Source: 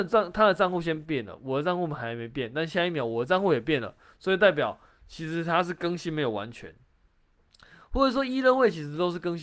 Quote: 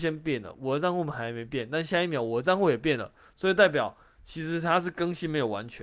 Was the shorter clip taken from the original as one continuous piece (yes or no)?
yes